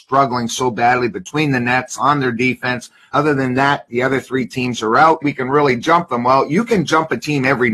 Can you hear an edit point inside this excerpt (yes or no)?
yes